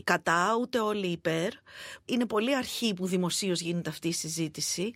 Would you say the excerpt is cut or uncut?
uncut